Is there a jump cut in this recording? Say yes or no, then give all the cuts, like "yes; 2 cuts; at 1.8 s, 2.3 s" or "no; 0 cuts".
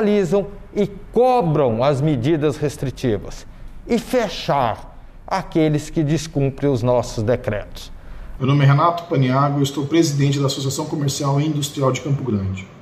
yes; 1 cut; at 8.4 s